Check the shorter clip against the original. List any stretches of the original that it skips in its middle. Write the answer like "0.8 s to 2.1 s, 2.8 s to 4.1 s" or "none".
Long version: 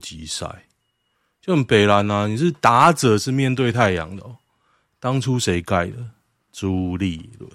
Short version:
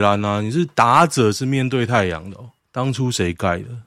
4.5 s to 4.9 s